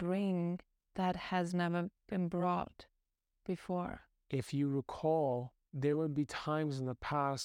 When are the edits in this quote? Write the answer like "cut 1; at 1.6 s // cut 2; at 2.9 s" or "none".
cut 1; at 2.0 s